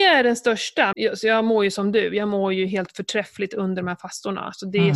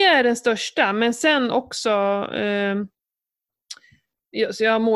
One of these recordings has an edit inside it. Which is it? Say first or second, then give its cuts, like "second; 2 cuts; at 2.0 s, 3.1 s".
first; 1 cut; at 0.9 s